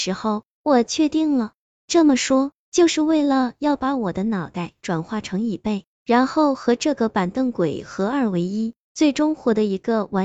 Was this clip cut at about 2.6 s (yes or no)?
yes